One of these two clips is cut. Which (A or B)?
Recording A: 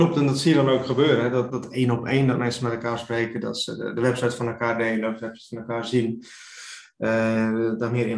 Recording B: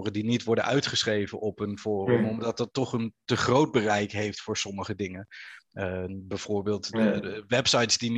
A